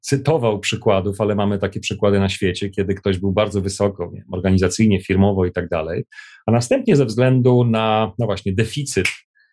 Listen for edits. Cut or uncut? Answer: uncut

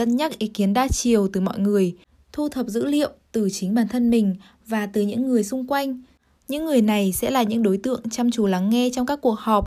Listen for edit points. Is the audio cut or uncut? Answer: cut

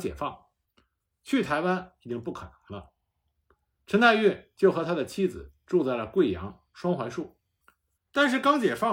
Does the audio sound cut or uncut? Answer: cut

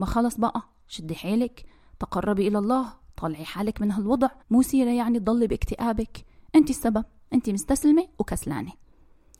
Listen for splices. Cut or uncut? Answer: cut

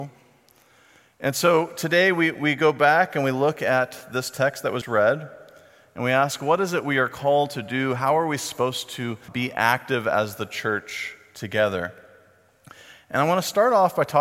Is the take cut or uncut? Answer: cut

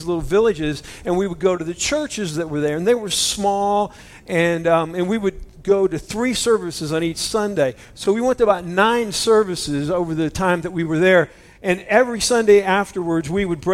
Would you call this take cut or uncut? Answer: uncut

